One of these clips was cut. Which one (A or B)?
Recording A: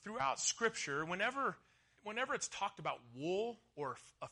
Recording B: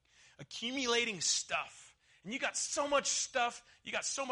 A